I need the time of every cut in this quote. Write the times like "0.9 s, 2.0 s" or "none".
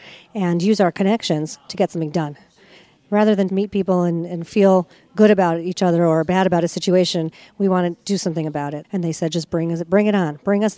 3.5 s, 8.8 s